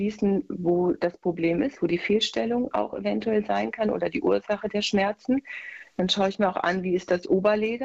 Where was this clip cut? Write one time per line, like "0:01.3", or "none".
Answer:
none